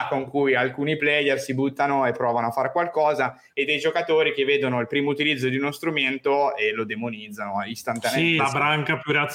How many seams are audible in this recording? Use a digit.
1